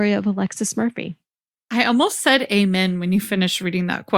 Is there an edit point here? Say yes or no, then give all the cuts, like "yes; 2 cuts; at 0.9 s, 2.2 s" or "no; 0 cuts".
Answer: no; 0 cuts